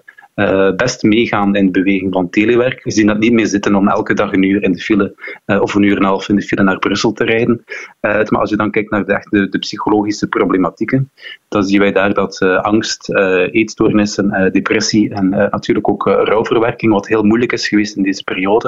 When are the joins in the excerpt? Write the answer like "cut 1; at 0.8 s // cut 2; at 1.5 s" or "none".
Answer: cut 1; at 2.9 s // cut 2; at 8.3 s